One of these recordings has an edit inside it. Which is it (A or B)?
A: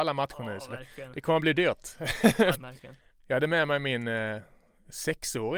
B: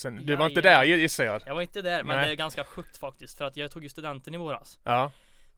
A